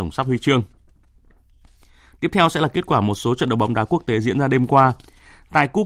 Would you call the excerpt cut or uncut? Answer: uncut